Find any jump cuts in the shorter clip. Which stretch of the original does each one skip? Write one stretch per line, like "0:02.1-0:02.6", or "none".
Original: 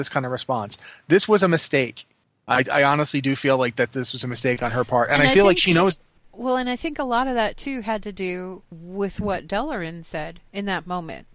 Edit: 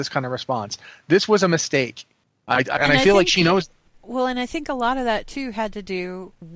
0:02.8-0:05.1